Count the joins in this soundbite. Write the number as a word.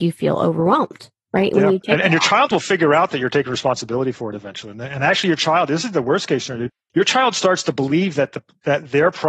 zero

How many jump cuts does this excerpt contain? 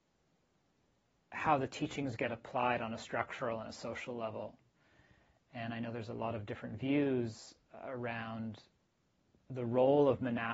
zero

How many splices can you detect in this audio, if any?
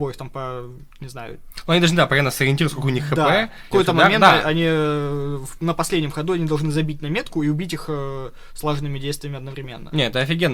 one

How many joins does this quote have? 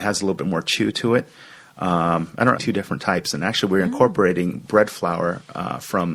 one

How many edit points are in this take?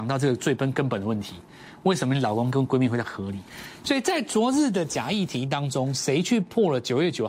one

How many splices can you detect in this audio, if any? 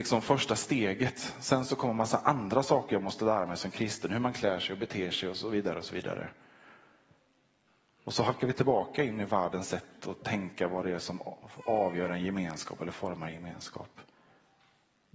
zero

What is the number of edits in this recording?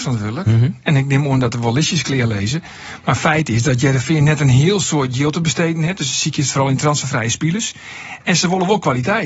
zero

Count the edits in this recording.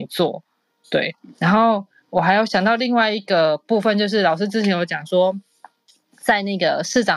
zero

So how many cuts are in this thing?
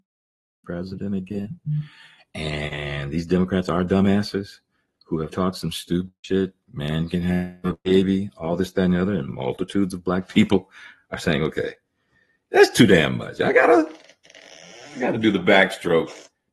one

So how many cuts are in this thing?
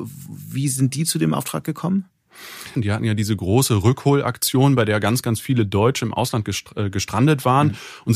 one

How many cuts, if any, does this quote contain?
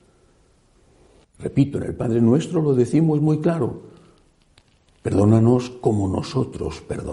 one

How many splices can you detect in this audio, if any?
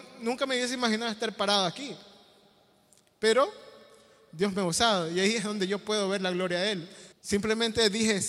one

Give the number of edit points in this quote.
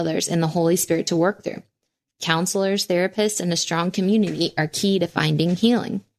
zero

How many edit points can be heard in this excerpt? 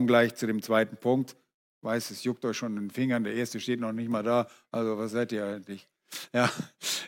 zero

